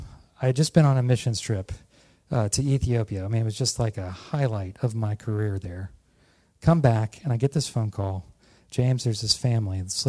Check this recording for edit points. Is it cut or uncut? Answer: uncut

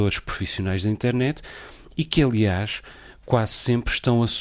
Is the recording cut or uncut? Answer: uncut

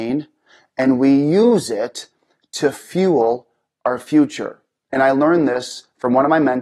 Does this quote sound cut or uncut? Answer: uncut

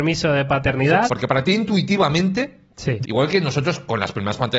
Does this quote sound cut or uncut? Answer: cut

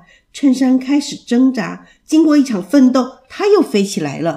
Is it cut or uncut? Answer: uncut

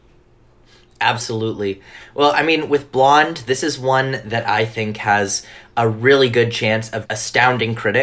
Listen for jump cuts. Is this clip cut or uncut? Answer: cut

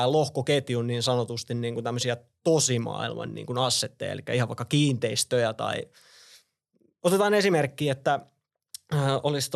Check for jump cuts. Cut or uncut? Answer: uncut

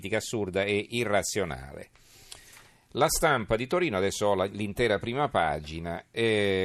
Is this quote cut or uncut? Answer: uncut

